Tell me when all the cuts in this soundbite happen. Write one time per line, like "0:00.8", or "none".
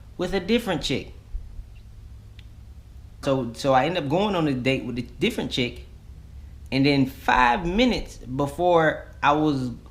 0:03.2